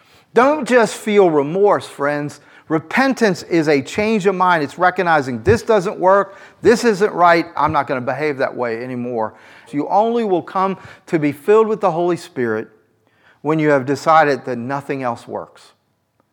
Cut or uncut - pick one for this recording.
cut